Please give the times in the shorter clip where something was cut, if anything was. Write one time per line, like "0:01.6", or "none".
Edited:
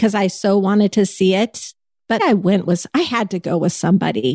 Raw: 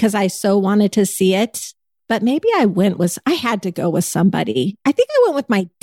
0:02.2

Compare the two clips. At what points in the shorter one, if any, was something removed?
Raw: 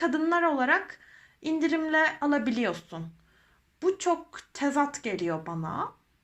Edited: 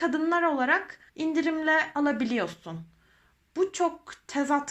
0:01.1

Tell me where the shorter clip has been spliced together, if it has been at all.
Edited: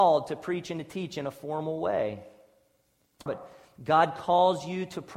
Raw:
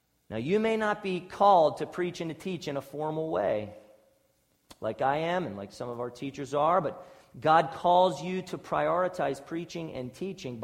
0:03.3

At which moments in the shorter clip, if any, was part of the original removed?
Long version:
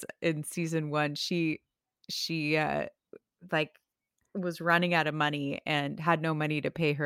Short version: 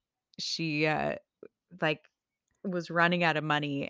none

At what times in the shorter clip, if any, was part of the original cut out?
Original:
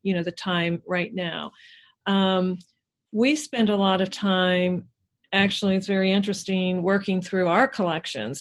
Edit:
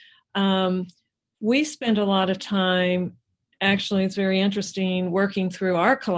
none

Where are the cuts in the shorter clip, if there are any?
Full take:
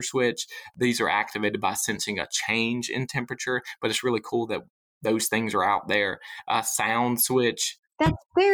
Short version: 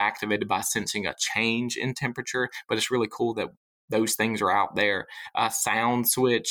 none

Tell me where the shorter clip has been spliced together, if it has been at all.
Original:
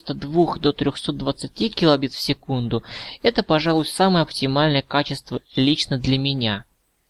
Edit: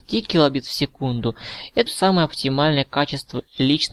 0:01.9

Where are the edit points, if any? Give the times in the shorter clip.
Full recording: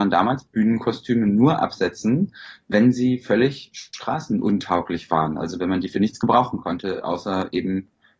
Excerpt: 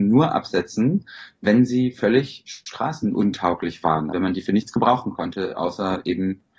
0:04.1

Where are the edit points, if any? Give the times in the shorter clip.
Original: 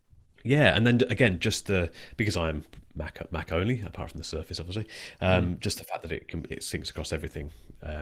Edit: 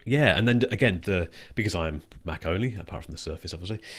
0:01.0
0:02.2

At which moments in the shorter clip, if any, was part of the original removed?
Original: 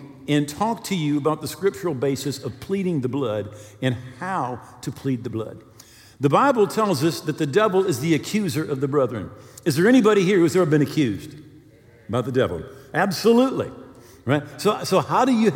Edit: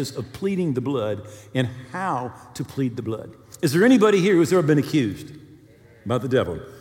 0:03.5

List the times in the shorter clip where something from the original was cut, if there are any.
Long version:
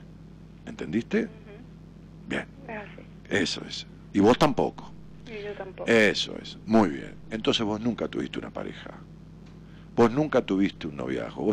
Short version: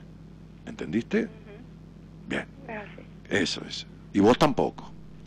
none

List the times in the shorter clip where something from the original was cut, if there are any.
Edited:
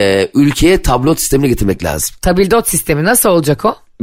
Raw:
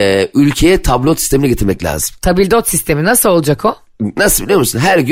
none

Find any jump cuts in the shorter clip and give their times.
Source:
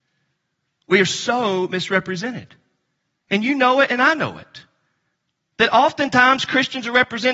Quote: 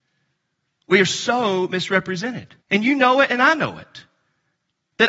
0:02.6

